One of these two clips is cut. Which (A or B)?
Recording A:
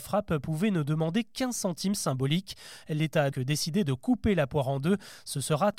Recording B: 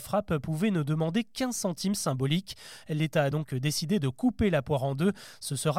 A